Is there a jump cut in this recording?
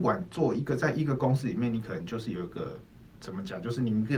no; 0 cuts

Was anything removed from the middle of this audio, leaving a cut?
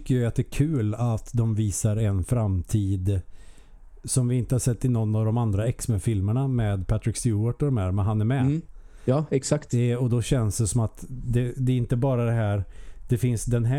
no; 0 cuts

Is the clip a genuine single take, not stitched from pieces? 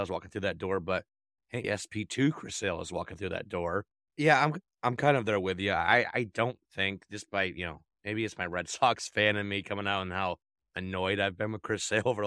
no; 2 cuts; at 1.6 s, 4.1 s

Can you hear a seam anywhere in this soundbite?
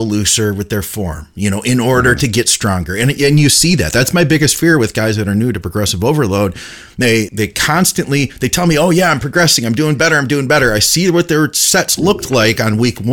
yes; 1 cut; at 7.3 s

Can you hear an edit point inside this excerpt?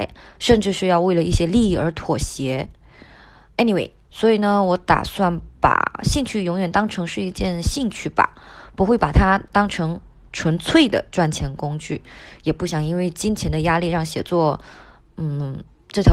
yes; 1 cut; at 4.1 s

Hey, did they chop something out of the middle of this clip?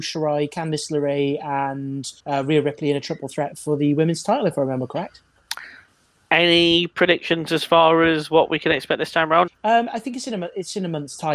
yes; 2 cuts; at 2.2 s, 9.5 s

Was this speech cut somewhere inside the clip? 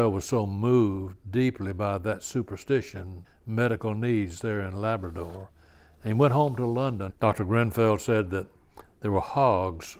yes; 2 cuts; at 3.2 s, 7.1 s

